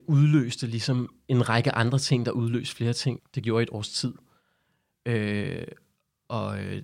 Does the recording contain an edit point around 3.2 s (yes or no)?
yes